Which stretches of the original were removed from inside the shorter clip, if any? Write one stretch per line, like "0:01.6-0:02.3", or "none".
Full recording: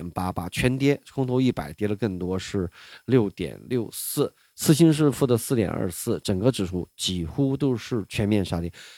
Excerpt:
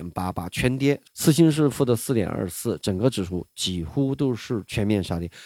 0:01.1-0:04.5

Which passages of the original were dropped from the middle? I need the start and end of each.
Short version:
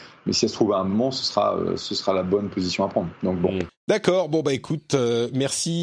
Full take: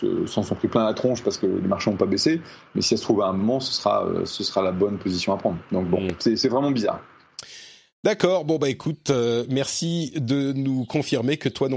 0:06.2-0:07.8

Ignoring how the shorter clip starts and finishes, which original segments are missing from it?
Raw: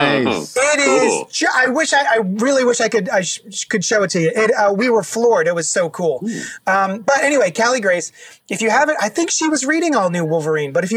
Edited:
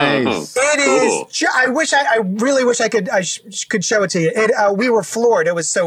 none

